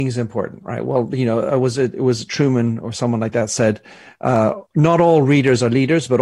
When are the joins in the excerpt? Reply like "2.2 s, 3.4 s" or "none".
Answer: 4.7 s

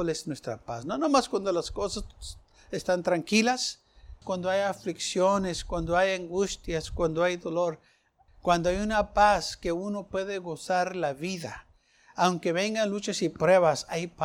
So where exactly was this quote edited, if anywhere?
4.2 s, 8.3 s

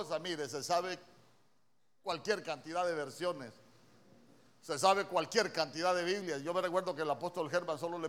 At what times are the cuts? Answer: none

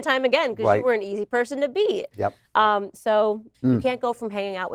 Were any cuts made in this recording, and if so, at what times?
3.5 s

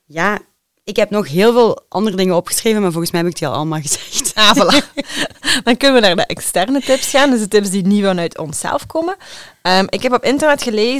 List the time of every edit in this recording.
none

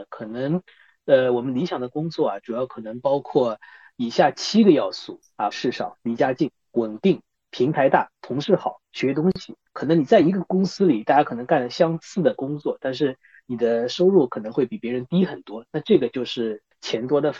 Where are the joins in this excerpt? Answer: 5.5 s, 9.7 s

